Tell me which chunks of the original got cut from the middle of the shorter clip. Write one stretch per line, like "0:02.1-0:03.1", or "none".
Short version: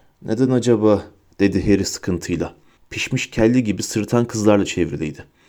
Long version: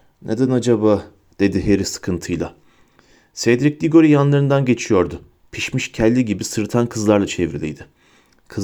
0:02.8-0:05.4